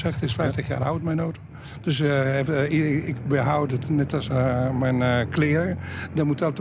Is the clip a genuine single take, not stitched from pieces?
yes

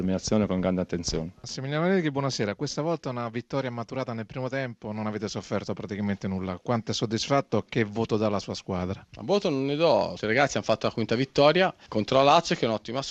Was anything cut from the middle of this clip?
yes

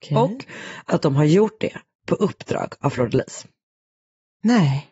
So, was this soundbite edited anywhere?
no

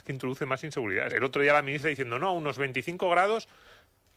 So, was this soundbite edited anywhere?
yes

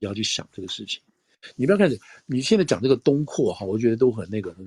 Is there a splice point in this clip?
no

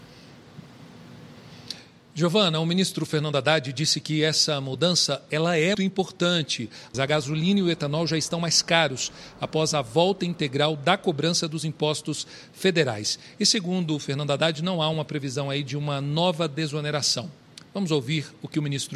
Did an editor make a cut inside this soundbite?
yes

